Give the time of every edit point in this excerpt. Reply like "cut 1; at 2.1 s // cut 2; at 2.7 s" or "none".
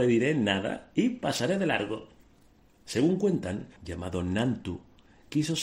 cut 1; at 2.7 s // cut 2; at 3.8 s